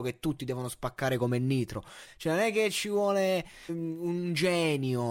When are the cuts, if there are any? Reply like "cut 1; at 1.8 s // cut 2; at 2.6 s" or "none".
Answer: cut 1; at 2.1 s // cut 2; at 3.7 s